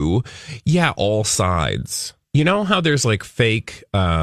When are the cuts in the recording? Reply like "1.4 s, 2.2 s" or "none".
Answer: 2.2 s